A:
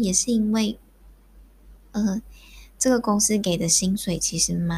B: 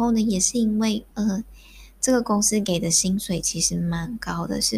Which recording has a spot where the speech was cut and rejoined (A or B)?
B